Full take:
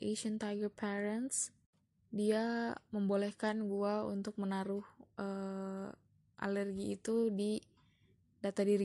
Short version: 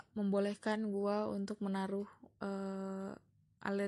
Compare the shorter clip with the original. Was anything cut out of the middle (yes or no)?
no